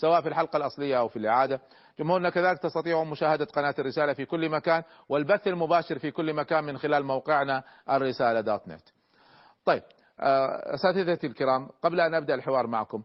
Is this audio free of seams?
yes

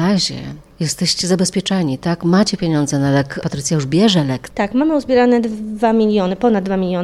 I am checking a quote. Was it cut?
no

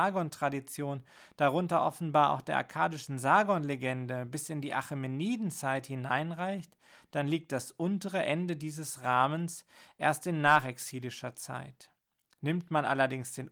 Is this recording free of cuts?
yes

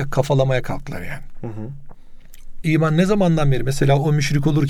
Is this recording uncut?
no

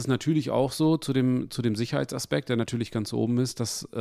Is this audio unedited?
yes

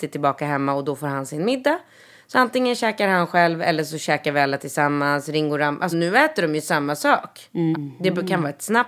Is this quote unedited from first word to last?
no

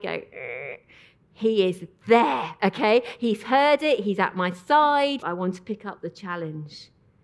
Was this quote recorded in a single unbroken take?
no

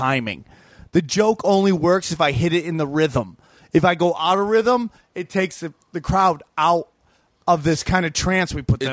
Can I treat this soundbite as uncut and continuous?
yes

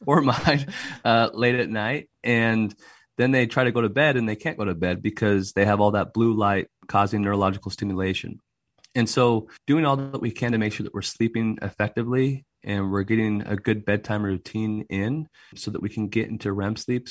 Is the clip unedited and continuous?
no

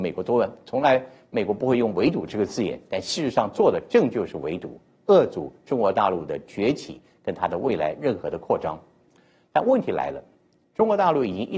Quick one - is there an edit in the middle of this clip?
no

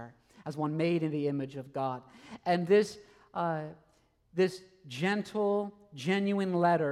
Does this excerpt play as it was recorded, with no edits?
yes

